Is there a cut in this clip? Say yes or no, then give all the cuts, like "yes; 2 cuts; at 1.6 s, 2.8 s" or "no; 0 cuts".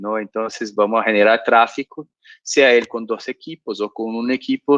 no; 0 cuts